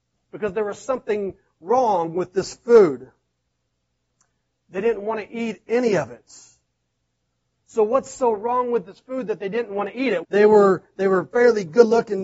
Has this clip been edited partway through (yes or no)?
yes